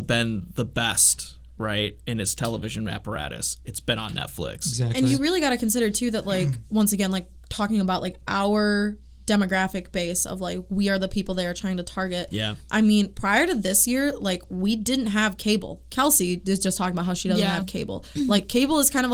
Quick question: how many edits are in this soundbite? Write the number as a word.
zero